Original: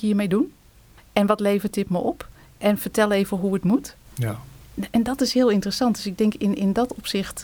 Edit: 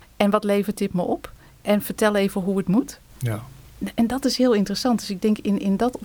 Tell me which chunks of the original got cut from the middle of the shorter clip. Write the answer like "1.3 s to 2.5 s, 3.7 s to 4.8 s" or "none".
none